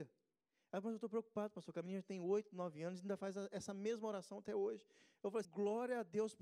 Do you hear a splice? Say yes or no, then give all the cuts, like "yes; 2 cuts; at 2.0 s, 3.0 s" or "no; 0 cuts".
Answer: yes; 1 cut; at 5.4 s